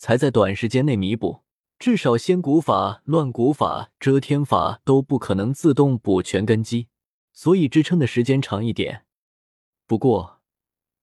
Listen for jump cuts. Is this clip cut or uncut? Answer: cut